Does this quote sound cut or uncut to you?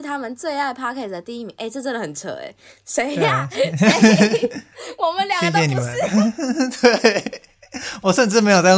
uncut